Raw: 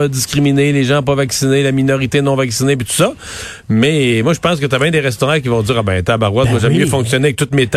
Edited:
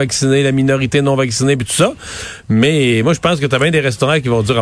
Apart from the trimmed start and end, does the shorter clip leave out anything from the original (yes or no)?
no